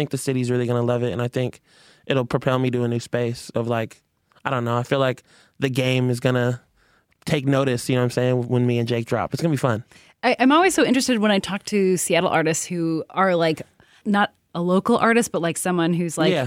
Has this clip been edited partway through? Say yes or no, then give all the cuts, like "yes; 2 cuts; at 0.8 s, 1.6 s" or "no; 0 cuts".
no; 0 cuts